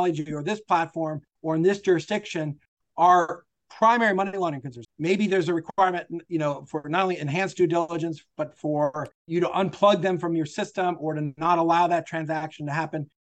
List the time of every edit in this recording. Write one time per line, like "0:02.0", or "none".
0:04.8
0:09.2

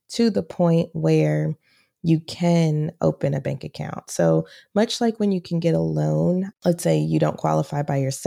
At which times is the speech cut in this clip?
0:04.1

